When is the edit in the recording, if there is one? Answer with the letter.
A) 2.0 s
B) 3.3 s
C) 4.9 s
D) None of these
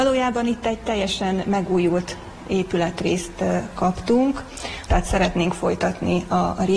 C